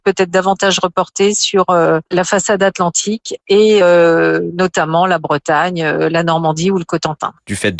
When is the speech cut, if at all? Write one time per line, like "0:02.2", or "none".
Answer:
none